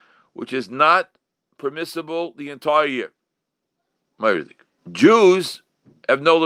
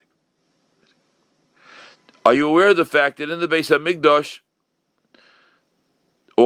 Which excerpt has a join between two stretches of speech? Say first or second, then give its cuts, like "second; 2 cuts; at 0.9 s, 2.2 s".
first; 1 cut; at 4.8 s